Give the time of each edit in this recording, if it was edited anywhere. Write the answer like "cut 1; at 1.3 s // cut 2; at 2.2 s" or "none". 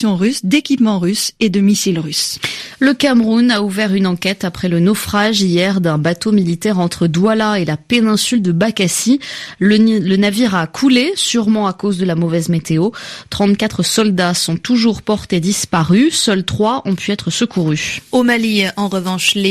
none